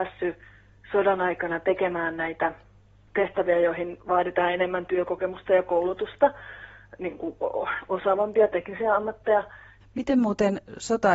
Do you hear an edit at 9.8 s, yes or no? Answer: yes